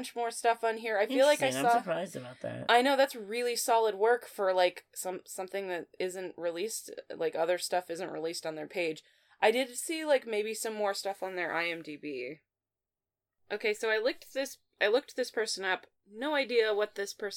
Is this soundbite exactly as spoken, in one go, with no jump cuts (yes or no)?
yes